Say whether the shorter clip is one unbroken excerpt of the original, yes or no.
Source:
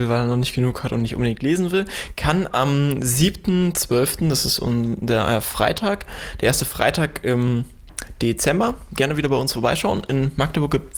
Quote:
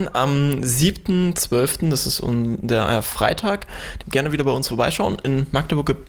no